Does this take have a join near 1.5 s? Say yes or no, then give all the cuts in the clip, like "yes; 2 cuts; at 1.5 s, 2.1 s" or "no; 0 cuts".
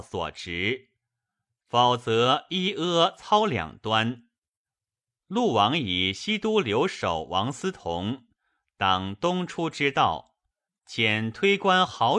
no; 2 cuts; at 5.2 s, 10.7 s